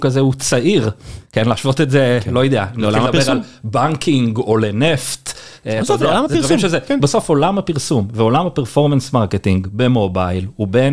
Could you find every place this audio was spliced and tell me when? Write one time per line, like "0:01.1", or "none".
none